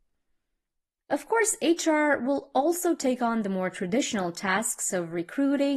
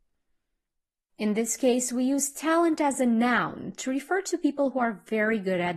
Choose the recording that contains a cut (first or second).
first